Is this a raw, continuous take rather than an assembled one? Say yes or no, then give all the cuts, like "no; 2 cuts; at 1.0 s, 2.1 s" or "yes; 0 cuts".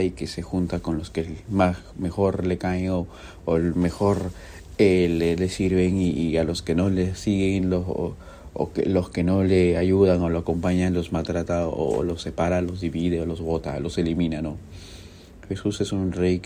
yes; 0 cuts